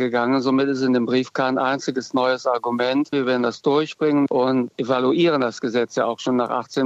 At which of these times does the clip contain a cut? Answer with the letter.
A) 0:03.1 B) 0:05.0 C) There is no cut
A